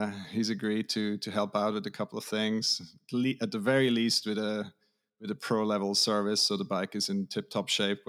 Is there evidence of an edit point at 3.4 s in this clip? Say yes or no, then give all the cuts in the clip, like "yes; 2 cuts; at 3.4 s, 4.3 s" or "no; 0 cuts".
no; 0 cuts